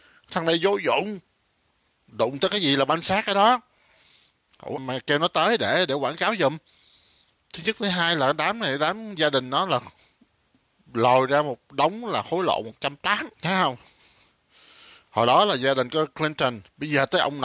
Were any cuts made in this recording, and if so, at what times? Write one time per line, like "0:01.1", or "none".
0:04.8
0:13.3